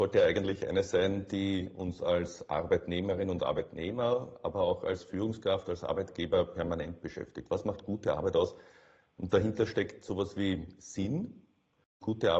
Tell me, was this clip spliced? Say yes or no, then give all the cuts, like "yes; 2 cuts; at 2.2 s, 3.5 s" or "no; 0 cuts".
no; 0 cuts